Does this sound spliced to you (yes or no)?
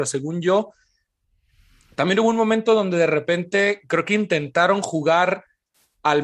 no